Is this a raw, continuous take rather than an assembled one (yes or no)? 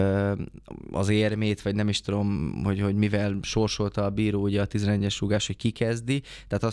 yes